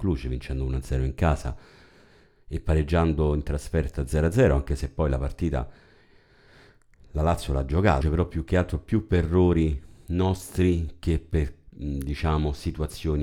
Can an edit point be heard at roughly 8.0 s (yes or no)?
yes